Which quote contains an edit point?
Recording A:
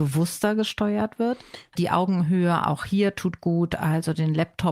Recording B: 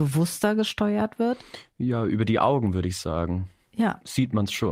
A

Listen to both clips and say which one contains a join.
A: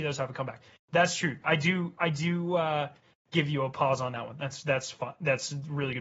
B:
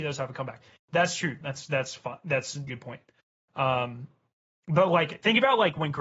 B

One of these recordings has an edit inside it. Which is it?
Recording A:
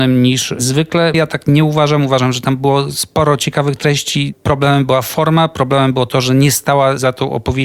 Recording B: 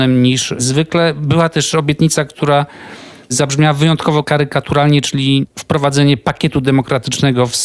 A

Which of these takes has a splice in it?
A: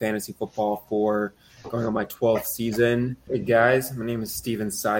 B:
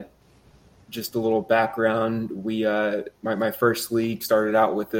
A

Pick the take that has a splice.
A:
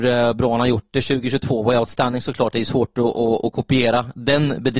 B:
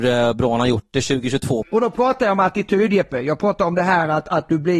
B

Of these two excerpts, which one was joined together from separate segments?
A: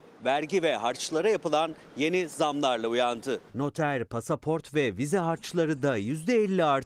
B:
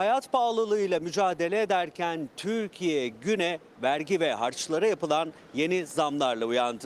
A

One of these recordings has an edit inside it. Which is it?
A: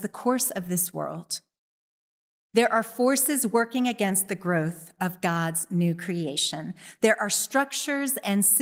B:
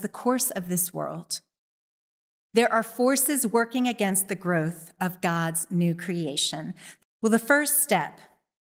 B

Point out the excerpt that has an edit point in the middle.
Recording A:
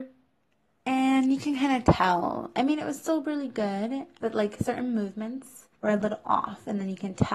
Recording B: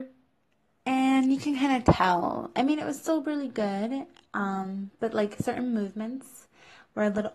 A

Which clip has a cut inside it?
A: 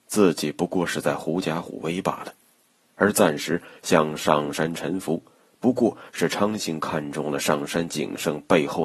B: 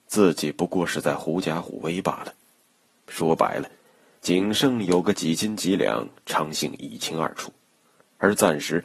A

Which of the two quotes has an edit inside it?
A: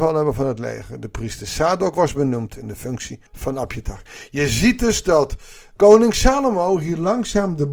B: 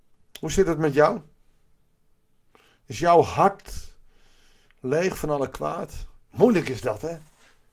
A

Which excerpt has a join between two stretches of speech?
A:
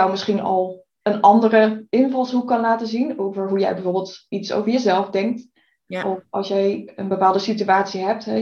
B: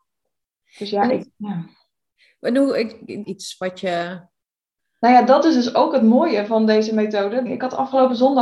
B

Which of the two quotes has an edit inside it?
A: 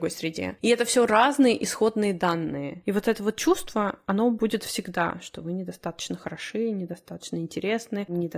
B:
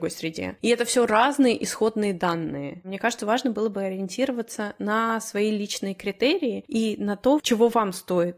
A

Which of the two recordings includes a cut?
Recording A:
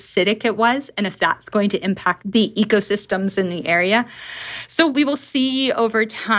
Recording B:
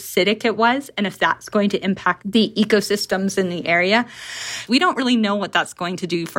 B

